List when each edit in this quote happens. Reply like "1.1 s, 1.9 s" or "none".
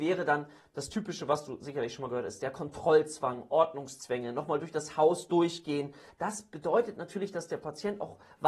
2.4 s, 6.1 s